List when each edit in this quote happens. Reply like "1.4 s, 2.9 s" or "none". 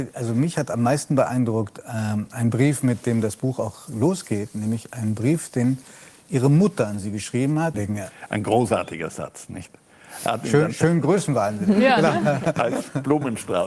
7.7 s